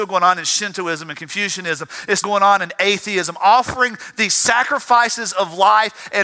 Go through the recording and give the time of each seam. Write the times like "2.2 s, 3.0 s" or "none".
2.2 s